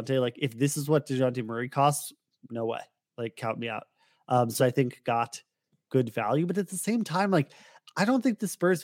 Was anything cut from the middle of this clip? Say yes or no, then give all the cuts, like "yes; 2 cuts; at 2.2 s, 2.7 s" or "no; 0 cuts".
yes; 1 cut; at 4.6 s